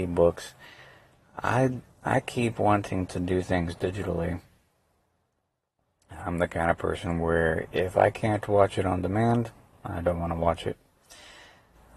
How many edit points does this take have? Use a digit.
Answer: 0